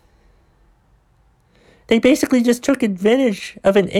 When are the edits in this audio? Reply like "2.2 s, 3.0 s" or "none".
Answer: none